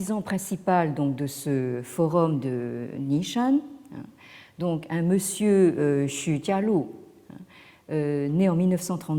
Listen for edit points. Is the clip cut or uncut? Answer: uncut